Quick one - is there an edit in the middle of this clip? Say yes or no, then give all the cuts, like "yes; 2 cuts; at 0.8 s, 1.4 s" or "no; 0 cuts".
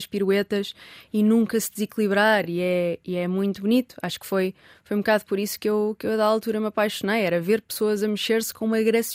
no; 0 cuts